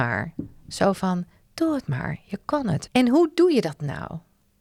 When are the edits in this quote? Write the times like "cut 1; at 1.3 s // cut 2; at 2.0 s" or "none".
cut 1; at 2.9 s